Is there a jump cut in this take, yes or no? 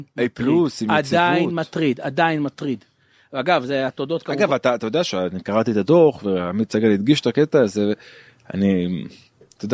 no